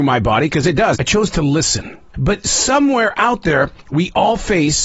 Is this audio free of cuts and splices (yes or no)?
no